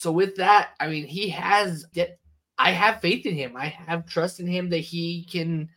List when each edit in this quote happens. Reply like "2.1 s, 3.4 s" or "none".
1.9 s